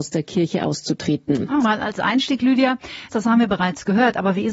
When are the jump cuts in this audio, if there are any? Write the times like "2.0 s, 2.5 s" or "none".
1.6 s, 3.1 s